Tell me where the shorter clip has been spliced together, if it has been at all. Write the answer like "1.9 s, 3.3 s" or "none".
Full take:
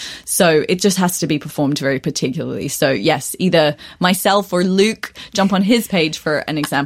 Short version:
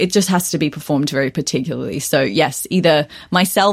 none